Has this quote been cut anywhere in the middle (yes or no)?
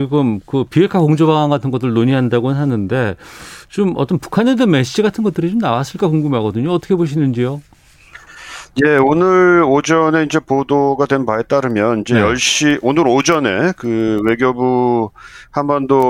yes